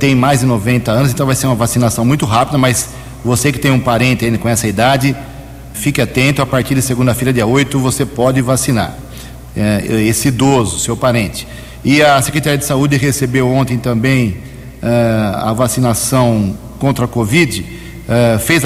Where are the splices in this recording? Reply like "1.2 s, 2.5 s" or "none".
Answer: 5.7 s